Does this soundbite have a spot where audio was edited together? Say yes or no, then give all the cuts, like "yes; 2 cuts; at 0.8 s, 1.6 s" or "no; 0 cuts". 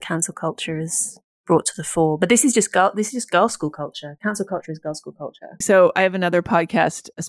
yes; 1 cut; at 5.6 s